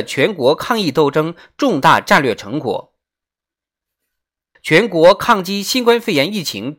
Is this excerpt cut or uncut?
cut